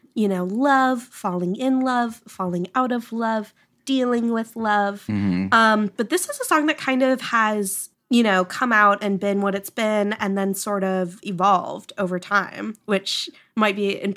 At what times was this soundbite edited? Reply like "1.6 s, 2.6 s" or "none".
7.9 s